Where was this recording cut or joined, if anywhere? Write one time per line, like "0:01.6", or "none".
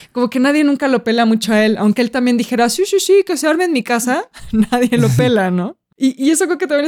none